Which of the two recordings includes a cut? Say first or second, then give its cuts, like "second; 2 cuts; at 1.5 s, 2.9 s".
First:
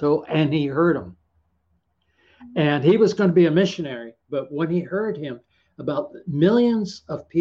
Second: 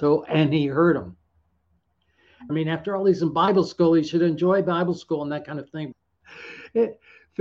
second; 2 cuts; at 2.5 s, 5.9 s